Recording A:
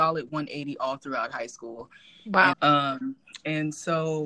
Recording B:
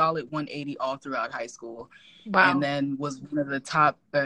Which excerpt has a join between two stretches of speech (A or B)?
A